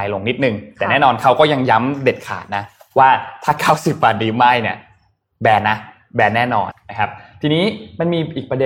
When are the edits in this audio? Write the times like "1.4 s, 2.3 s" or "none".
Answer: 6.7 s